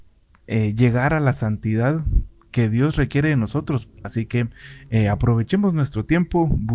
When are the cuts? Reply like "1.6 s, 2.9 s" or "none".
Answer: 4.0 s